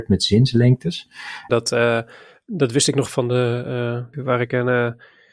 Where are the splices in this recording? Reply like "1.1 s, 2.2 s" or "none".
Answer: 1.5 s, 4.1 s